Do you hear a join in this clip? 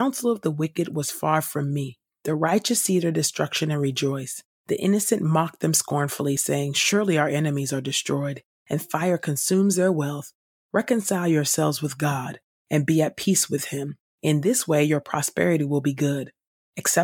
no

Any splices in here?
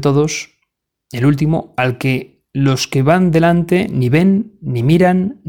no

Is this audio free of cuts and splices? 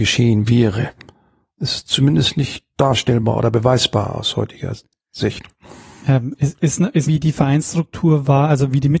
no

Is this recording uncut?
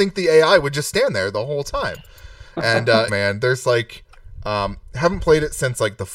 no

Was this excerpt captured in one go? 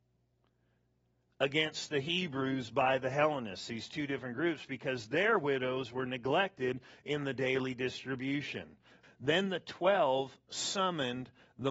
no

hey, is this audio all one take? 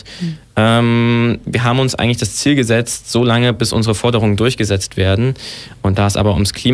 yes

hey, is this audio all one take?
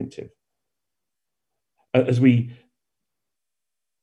yes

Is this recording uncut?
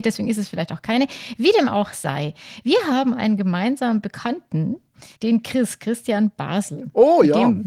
no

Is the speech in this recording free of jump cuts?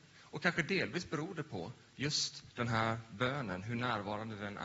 yes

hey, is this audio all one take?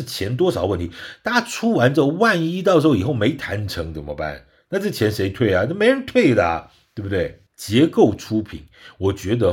no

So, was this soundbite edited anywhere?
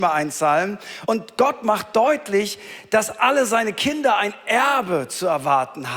yes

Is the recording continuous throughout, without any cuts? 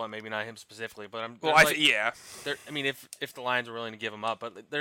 yes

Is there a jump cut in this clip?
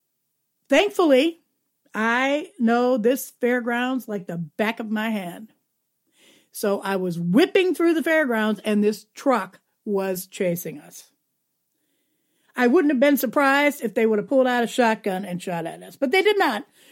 no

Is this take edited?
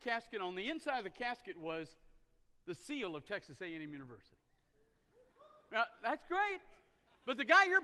no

